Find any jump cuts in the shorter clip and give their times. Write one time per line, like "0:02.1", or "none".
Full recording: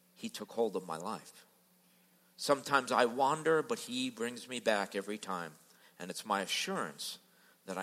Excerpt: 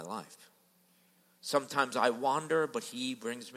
none